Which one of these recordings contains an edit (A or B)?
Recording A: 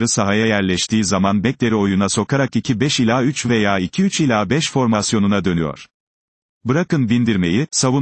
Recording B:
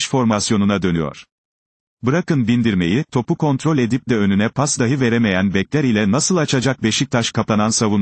B